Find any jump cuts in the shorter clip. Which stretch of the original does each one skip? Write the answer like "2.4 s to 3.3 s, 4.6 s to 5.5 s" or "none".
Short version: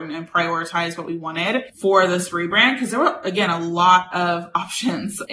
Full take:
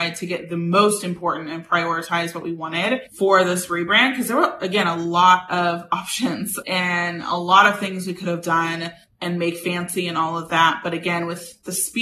none